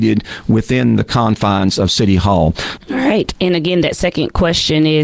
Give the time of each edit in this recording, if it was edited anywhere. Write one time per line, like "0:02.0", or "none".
0:02.8